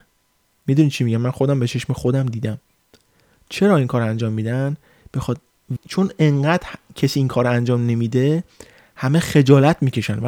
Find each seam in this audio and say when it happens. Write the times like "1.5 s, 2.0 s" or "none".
5.8 s